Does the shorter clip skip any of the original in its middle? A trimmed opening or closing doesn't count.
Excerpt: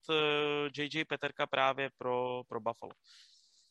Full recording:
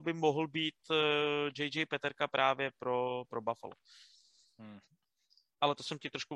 no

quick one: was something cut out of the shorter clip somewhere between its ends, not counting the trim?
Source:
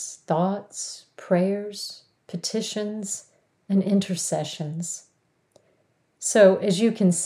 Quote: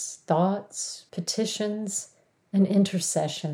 yes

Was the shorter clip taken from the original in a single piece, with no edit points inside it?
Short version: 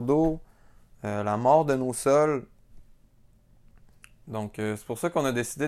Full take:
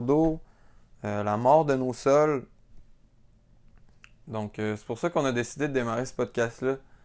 yes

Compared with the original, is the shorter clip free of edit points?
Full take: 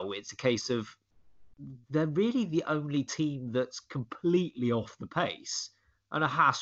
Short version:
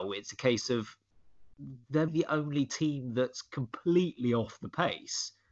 no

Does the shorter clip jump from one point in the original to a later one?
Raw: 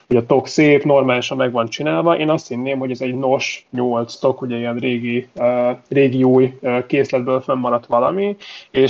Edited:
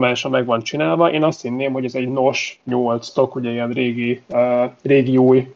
no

